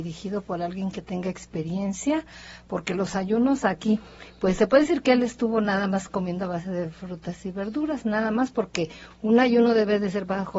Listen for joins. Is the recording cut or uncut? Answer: uncut